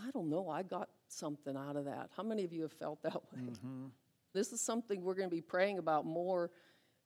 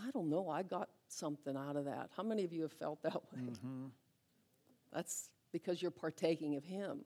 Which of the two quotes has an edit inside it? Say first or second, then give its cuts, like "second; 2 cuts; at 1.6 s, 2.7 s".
first; 1 cut; at 4.3 s